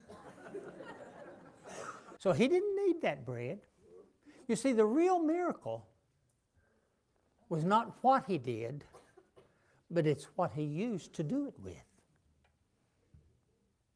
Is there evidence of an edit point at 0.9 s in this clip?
no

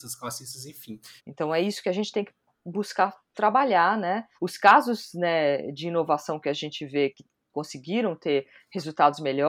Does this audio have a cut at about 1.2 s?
yes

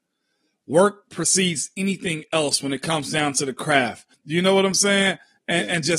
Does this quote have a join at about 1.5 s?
no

